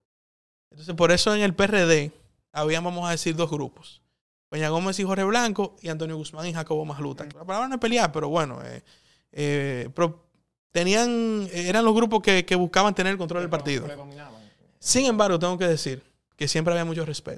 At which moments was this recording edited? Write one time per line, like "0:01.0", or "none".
0:07.3